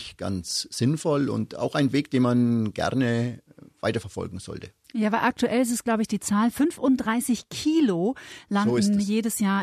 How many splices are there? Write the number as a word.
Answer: zero